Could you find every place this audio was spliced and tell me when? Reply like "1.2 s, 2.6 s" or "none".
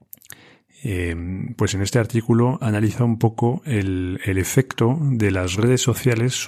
none